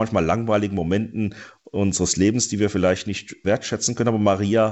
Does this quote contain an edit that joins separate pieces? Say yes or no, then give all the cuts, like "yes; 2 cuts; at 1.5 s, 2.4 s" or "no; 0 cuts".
yes; 1 cut; at 3.4 s